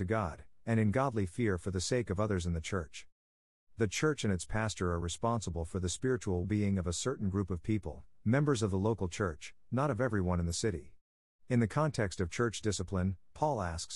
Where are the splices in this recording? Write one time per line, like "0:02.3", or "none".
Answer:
0:03.6
0:06.4